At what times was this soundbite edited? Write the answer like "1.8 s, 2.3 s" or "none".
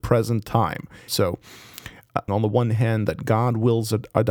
1.1 s, 2.3 s